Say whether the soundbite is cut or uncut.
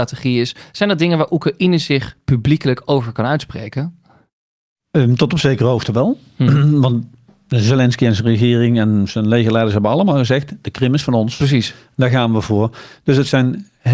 uncut